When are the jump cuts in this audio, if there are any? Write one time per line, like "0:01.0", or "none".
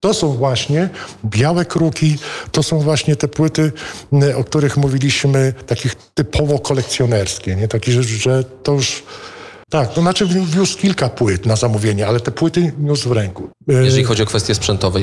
0:09.7
0:13.5